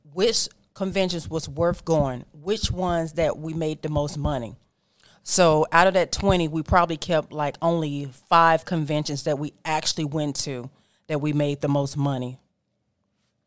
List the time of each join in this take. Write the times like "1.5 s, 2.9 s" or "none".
none